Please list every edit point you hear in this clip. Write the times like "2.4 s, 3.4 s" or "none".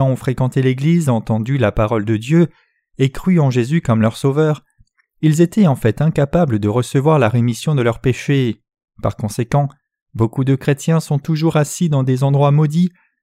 8.9 s